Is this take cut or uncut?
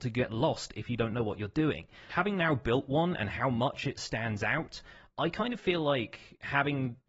cut